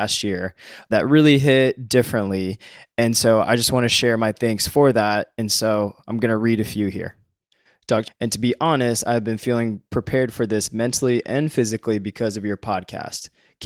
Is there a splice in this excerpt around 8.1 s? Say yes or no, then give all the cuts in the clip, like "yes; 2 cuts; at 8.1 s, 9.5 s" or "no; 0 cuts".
yes; 1 cut; at 8.1 s